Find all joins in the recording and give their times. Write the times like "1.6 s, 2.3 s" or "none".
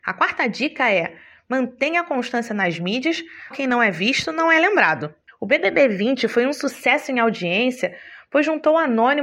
3.5 s, 5.3 s